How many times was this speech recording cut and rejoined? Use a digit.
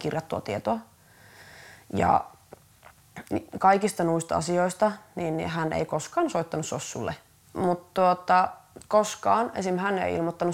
1